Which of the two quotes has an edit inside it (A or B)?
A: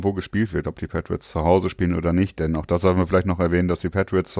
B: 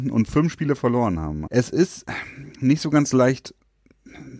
B